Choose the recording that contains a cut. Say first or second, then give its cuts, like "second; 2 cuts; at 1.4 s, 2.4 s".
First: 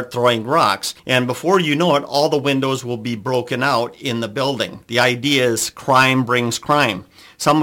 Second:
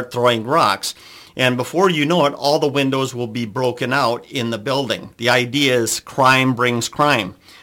first; 1 cut; at 1.0 s